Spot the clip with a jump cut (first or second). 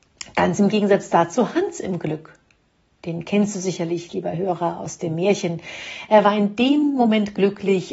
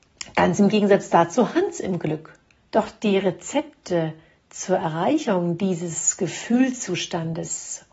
second